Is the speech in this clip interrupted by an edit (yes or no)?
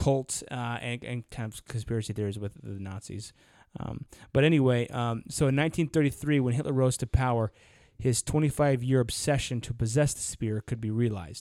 no